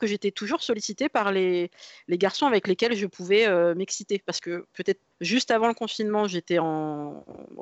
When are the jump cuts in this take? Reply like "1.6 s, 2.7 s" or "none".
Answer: 5.1 s